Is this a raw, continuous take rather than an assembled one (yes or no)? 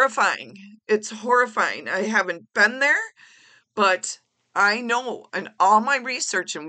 yes